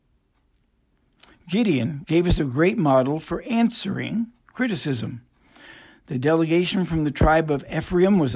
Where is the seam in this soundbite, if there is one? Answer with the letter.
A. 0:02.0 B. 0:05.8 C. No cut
A